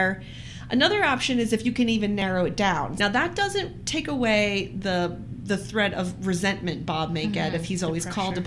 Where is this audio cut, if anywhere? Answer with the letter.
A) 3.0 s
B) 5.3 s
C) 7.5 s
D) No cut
A